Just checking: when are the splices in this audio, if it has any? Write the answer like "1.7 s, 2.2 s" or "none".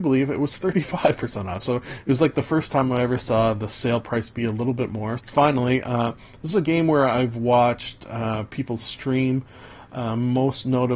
5.2 s